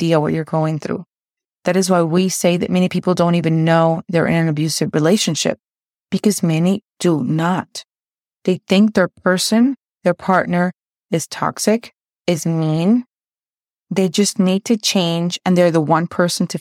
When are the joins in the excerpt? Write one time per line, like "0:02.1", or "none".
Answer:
none